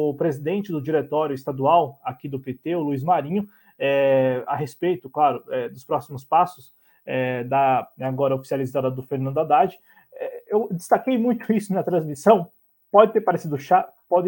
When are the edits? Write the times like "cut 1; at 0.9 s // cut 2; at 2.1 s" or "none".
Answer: cut 1; at 8.0 s